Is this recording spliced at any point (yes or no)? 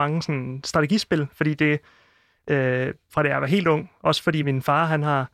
yes